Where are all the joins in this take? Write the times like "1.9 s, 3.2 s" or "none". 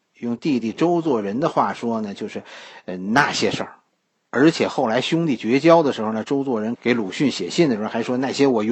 6.8 s